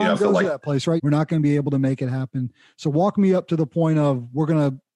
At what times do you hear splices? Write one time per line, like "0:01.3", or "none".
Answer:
0:01.0